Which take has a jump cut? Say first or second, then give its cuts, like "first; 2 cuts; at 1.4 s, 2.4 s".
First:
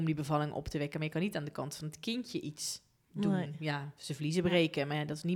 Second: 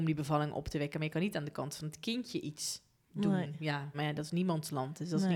second; 1 cut; at 3.9 s